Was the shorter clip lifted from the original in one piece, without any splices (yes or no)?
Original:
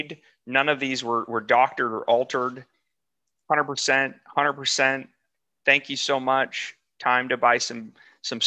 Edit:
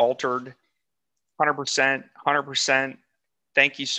yes